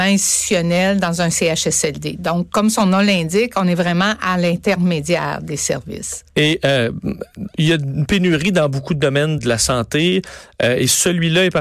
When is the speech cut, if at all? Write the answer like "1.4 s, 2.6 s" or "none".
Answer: 6.3 s, 9.4 s